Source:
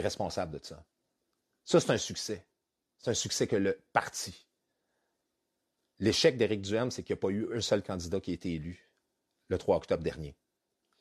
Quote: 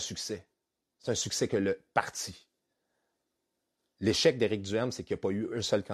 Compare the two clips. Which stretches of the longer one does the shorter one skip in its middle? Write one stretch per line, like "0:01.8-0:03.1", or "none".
none